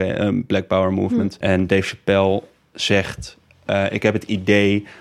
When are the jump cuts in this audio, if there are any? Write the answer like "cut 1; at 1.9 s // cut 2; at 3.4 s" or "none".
cut 1; at 1.4 s